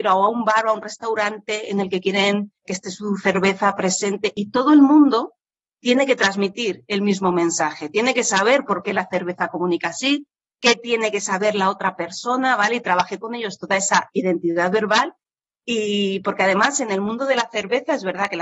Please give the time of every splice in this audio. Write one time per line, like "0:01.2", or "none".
none